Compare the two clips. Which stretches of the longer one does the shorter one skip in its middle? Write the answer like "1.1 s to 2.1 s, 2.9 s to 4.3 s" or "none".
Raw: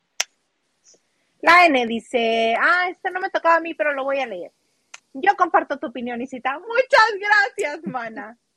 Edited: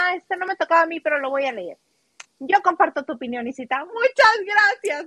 none